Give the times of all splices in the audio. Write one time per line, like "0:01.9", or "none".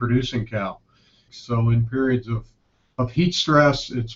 0:01.3